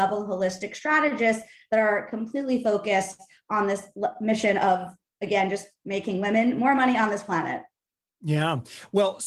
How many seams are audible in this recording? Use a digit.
0